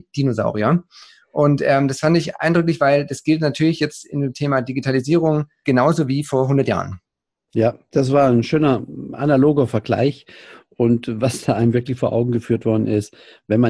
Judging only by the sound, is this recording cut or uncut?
cut